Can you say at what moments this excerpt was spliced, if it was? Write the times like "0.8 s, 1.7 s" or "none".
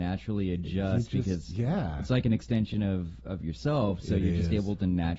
none